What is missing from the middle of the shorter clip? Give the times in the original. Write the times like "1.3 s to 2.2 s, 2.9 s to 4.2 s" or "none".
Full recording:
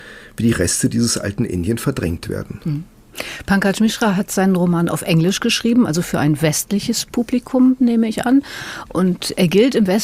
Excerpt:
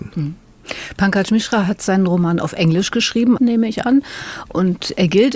5.9 s to 7.8 s

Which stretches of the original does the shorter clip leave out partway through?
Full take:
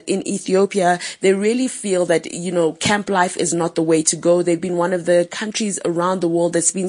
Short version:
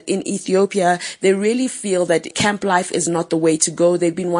2.3 s to 2.8 s

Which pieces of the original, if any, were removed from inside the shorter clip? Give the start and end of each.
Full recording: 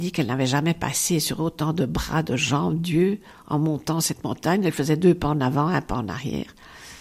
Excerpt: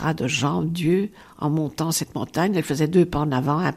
none

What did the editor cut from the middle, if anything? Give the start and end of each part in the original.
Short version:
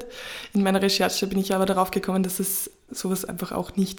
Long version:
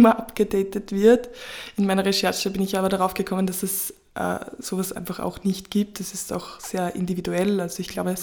4.1 s to 4.6 s

